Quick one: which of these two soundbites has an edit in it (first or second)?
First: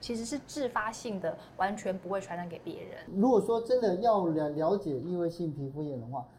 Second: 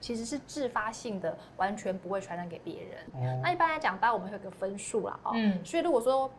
second